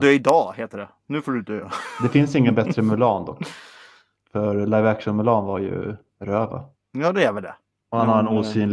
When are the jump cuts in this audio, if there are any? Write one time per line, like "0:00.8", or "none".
0:06.8